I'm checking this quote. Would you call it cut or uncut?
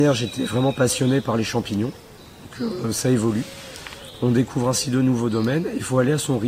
uncut